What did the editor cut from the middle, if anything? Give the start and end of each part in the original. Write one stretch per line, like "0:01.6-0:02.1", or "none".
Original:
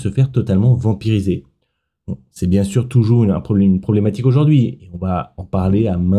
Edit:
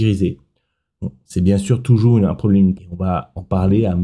0:03.8-0:04.8